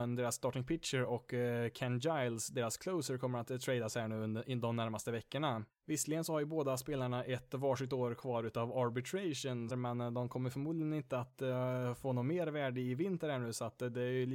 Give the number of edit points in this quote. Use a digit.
2